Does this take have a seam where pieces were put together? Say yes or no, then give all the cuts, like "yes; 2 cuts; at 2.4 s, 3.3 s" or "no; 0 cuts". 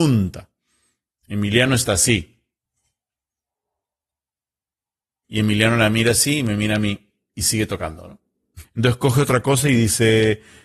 yes; 2 cuts; at 5.2 s, 8.6 s